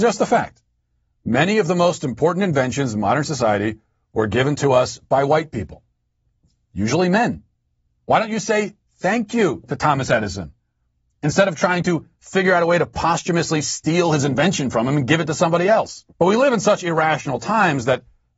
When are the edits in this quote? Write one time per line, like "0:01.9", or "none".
0:07.9
0:16.1